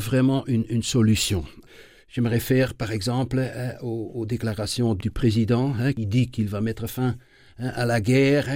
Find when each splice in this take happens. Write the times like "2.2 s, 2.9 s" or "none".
none